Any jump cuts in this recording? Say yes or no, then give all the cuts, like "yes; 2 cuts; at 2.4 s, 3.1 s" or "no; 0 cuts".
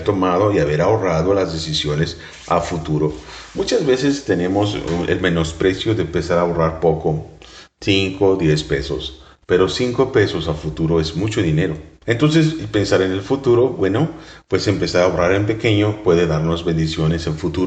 yes; 1 cut; at 12.0 s